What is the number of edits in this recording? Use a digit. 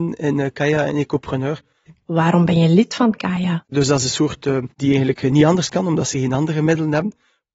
3